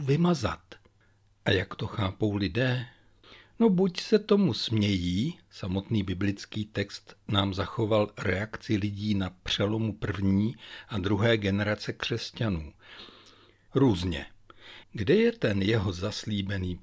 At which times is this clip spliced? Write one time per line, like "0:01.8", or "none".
0:13.7
0:14.8